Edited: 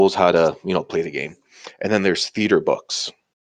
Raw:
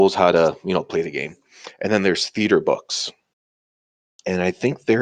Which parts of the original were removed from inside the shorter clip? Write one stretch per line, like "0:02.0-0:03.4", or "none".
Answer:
none